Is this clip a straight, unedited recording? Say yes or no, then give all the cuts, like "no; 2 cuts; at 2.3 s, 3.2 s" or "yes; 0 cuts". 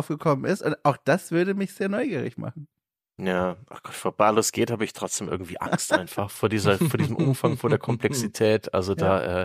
yes; 0 cuts